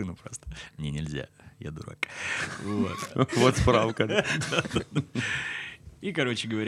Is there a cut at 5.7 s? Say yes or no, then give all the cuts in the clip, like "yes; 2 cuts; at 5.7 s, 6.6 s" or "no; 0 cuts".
no; 1 cut; at 3.3 s